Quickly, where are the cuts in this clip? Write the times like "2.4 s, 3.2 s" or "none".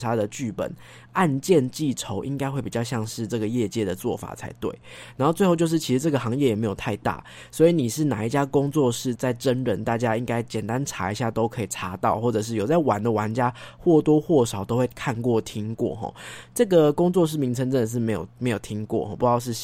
9.1 s